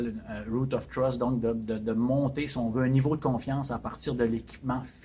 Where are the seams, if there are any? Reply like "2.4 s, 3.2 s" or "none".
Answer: none